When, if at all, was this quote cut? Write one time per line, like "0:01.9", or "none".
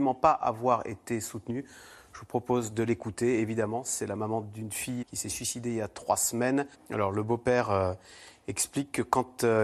0:05.0
0:06.7

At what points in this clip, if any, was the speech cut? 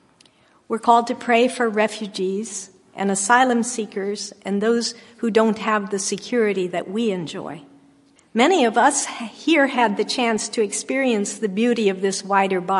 0:08.2

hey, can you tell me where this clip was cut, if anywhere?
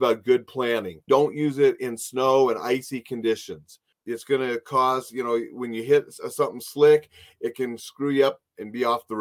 0:01.1

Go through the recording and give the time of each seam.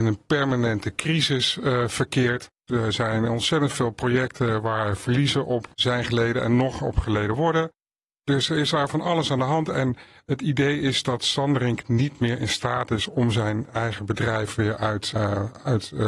0:02.7
0:15.1

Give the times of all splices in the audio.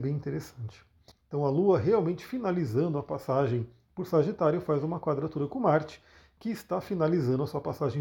0:01.1

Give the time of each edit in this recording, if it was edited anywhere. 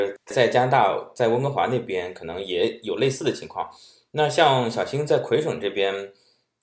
none

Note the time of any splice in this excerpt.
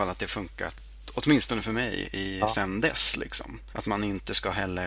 0:03.7

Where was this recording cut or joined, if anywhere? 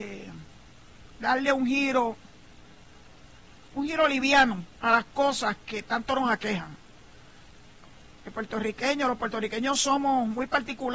0:08.2

